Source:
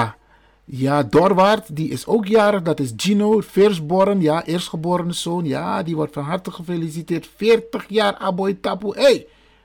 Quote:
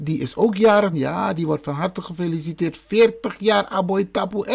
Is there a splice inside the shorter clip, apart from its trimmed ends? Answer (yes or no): yes